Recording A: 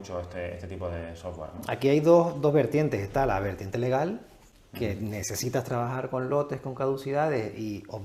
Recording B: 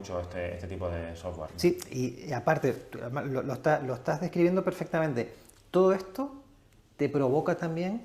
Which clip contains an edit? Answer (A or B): B